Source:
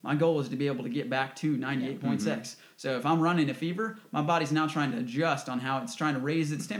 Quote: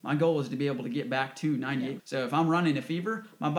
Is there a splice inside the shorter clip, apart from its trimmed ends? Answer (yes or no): yes